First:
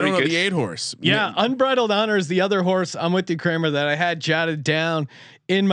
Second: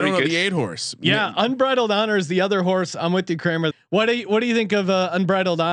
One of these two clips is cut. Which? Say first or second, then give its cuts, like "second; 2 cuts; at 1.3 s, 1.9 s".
second; 1 cut; at 3.7 s